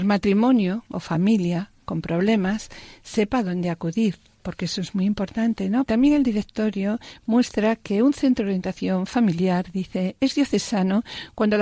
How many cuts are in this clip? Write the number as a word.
one